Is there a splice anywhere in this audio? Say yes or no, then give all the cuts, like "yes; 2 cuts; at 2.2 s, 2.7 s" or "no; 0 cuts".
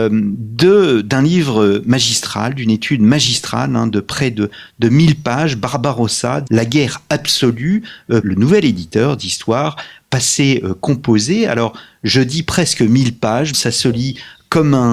yes; 3 cuts; at 6.5 s, 8.2 s, 13.5 s